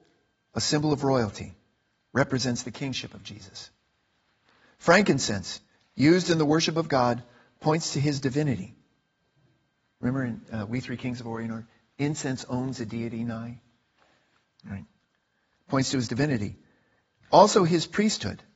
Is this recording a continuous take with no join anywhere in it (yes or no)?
yes